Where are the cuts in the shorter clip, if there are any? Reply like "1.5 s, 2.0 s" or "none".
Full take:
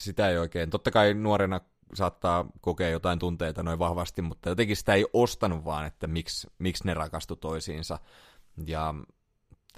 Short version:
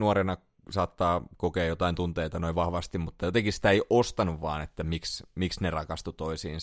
none